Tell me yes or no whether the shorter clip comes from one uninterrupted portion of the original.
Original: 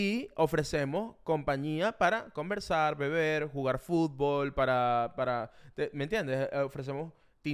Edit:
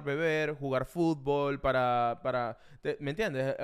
yes